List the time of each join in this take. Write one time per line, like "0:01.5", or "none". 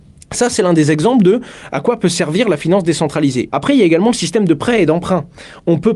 0:03.5